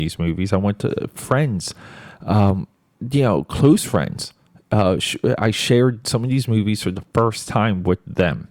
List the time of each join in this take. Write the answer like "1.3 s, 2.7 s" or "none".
none